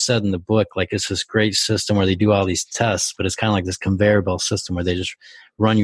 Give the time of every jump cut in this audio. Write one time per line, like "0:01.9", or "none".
none